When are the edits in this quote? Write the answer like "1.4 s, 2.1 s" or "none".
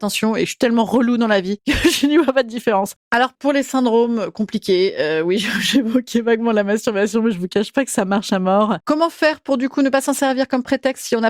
3.0 s, 8.8 s